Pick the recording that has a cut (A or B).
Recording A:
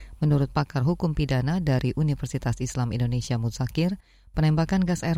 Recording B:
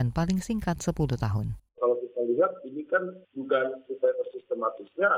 B